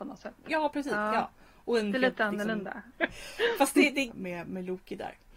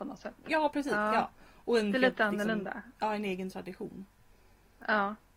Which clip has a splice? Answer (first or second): first